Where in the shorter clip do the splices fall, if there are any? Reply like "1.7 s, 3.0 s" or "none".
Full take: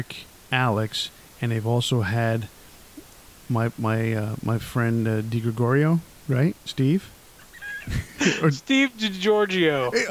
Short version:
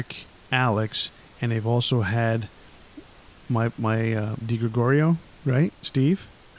4.4 s

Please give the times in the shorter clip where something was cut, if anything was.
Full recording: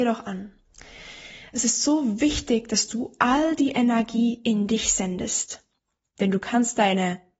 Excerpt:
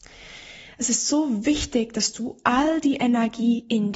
none

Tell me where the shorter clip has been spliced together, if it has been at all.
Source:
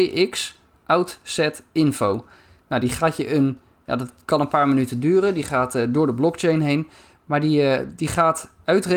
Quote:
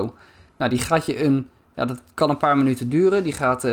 none

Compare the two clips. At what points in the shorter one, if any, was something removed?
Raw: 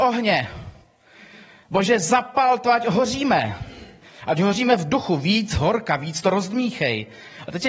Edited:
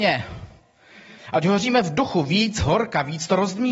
1.2 s

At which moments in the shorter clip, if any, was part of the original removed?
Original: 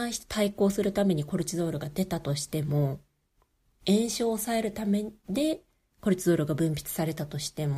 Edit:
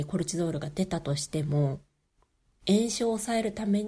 none

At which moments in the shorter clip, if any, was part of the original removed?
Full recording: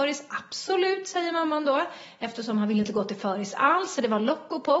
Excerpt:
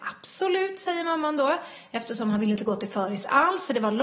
none

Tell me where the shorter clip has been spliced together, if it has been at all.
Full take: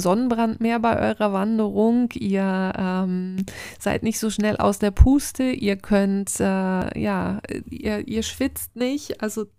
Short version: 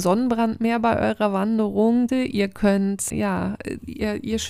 2.1 s, 3.1 s

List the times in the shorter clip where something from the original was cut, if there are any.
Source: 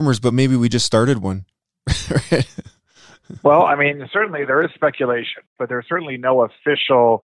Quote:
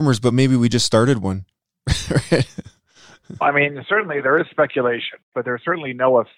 3.4 s

